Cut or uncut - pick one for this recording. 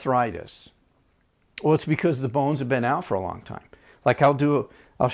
uncut